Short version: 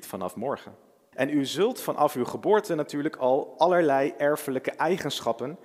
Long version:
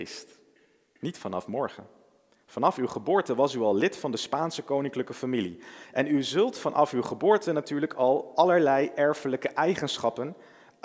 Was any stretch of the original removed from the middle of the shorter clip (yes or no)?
yes